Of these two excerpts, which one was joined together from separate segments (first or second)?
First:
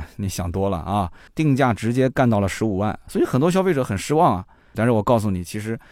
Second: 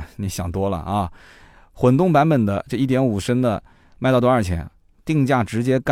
first